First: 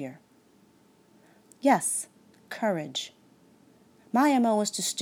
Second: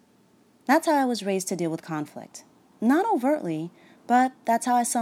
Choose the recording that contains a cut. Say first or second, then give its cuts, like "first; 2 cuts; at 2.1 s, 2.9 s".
first; 1 cut; at 1.5 s